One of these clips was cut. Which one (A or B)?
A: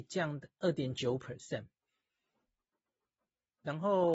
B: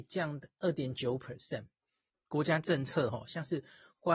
B